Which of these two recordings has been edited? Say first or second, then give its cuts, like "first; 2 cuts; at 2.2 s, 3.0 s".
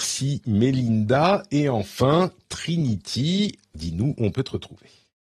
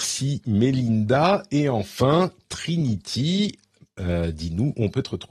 first; 1 cut; at 3.7 s